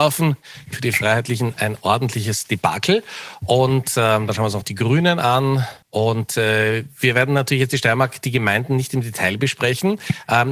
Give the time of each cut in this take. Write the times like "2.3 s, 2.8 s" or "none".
5.8 s